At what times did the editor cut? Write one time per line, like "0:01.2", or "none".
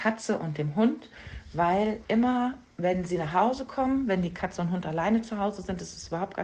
none